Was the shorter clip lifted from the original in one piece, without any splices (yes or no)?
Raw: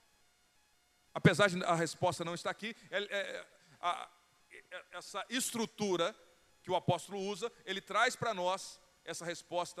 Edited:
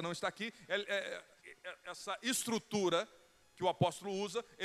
no